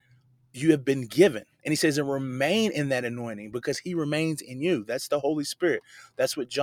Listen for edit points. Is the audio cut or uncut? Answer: cut